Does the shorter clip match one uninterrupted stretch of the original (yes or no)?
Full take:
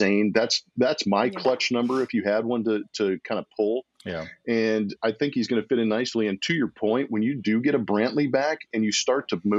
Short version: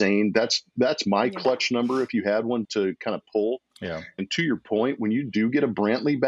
no